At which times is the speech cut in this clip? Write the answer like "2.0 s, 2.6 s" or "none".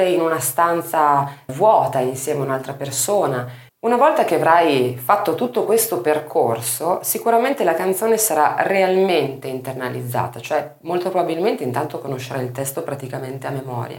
1.5 s, 3.7 s